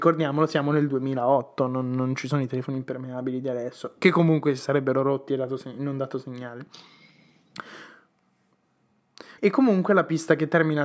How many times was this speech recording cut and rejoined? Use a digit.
1